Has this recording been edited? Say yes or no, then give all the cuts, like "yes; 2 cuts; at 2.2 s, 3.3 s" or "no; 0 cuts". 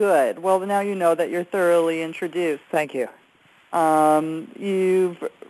yes; 1 cut; at 2.6 s